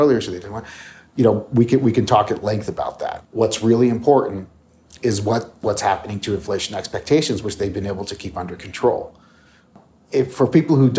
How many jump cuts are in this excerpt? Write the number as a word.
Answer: zero